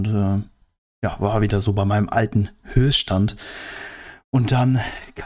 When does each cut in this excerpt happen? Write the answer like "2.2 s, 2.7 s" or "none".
none